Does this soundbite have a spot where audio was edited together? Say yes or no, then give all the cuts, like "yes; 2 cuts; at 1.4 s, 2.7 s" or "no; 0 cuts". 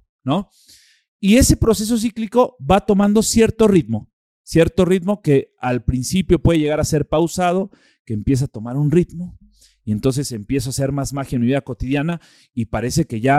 no; 0 cuts